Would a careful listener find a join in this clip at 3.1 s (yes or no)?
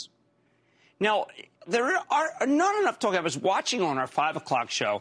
no